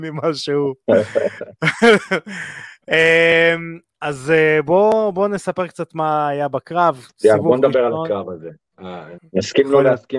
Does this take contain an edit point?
yes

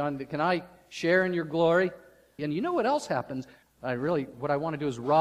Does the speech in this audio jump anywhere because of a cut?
yes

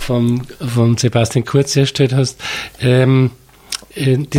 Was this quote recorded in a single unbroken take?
yes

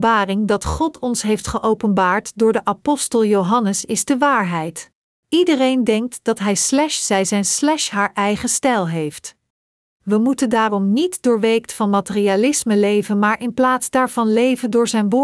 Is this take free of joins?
no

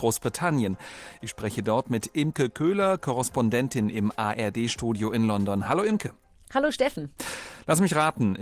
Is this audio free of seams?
yes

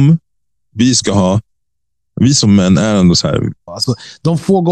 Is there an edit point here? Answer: yes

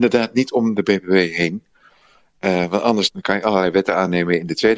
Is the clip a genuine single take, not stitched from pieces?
yes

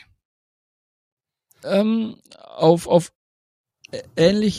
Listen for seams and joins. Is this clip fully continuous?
no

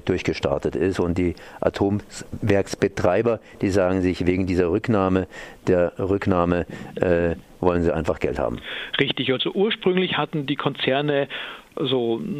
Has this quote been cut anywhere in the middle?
no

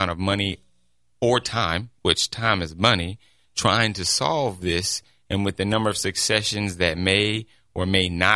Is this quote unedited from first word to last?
no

